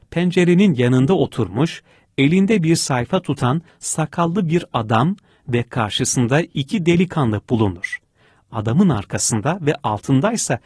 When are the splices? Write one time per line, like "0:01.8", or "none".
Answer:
none